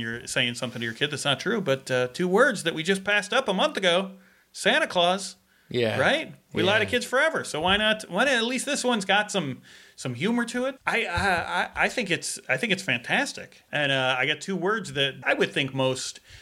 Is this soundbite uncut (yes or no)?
no